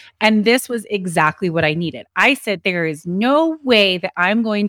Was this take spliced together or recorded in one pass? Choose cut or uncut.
uncut